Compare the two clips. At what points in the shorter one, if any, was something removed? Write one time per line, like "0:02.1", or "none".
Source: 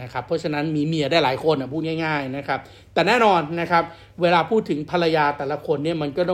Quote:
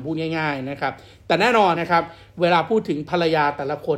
0:01.7